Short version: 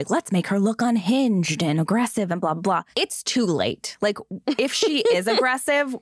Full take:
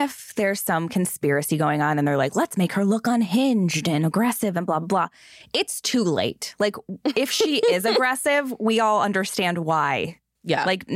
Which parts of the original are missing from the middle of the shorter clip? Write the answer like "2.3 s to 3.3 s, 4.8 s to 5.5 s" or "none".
5.2 s to 5.5 s